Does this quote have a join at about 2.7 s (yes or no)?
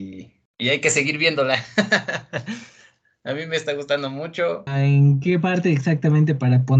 no